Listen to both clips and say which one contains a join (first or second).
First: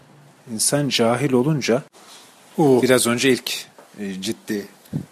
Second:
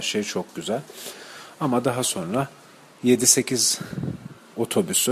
first